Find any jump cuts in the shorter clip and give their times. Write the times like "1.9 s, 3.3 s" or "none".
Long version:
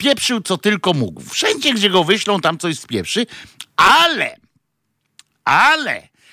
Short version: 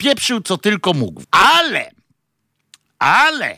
1.2 s